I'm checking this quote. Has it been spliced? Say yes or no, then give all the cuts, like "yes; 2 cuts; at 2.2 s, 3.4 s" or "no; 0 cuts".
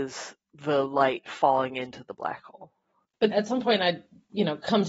yes; 1 cut; at 3.3 s